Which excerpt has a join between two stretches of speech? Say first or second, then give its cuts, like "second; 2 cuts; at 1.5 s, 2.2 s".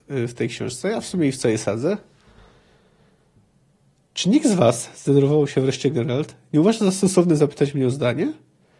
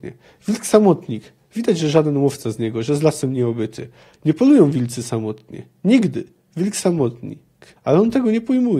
second; 1 cut; at 7.8 s